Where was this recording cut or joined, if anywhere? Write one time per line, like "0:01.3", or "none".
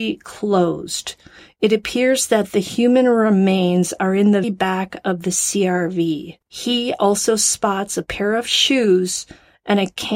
0:04.4
0:06.4